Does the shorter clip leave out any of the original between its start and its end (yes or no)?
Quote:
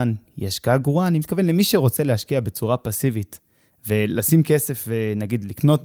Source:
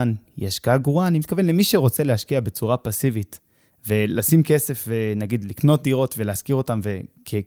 no